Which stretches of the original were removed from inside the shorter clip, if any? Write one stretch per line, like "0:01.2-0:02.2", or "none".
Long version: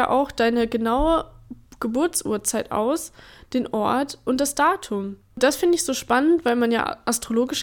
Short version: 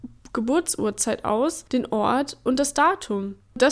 0:03.1-0:03.5

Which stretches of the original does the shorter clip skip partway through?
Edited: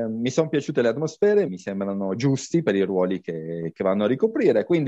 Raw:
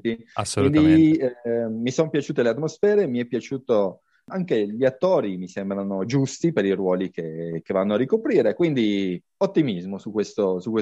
0:03.1-0:05.4

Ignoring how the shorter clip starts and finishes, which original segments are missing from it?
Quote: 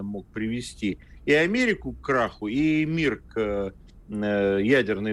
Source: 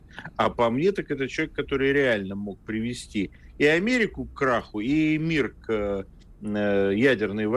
none

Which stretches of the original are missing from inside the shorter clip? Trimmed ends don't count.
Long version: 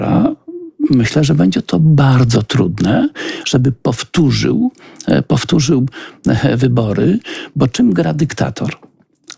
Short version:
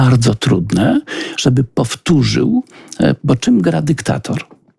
0:05.3-0:07.5

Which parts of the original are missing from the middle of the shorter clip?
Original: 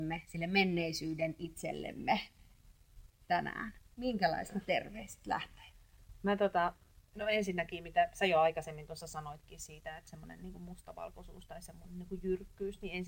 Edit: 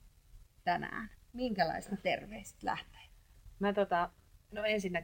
none

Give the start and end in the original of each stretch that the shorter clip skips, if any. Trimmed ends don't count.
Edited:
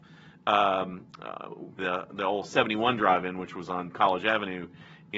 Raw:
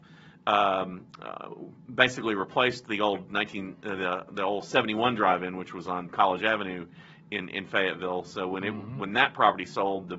0:01.8-0:04.0

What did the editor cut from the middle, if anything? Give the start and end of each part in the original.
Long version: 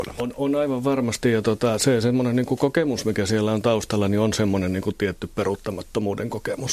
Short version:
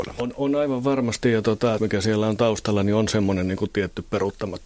0:01.8-0:03.0

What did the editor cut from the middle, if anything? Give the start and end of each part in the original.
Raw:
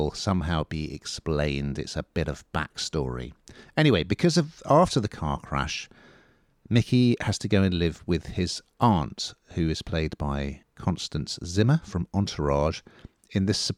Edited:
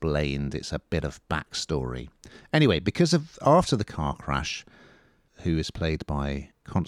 0:06.5-0:09.4

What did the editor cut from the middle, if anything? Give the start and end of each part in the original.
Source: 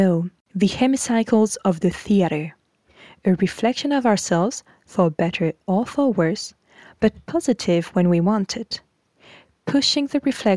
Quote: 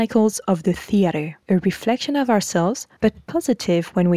0:02.6-0:03.2
0:04.7-0:07.0

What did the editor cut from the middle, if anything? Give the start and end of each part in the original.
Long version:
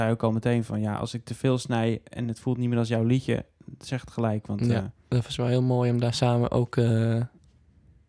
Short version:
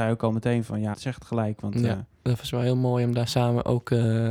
0:00.9-0:03.8

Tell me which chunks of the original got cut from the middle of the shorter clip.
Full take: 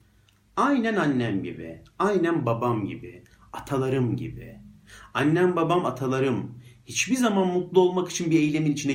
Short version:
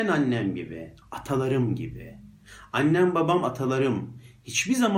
0:01.9-0:03.4

